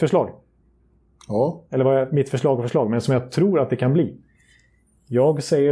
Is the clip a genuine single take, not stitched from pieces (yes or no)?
yes